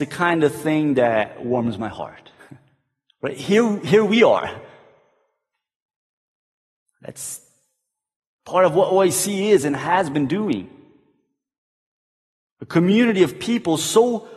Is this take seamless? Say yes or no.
yes